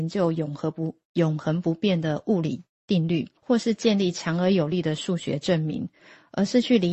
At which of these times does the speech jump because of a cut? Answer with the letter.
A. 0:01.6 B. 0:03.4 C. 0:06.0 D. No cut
B